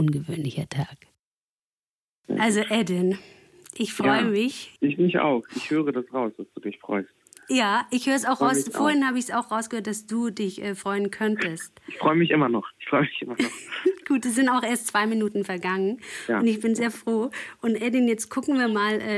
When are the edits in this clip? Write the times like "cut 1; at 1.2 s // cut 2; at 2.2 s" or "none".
cut 1; at 4.8 s